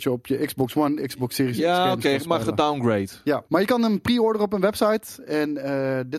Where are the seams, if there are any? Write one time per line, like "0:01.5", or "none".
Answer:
0:03.5